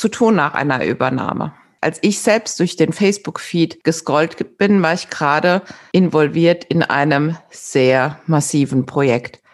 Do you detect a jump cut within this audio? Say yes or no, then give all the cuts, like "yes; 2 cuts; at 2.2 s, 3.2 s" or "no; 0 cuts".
yes; 1 cut; at 1.8 s